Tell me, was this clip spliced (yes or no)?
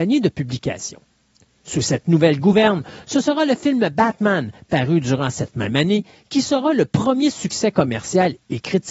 no